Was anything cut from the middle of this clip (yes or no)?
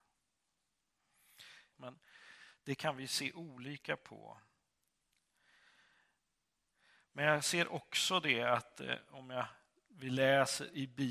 yes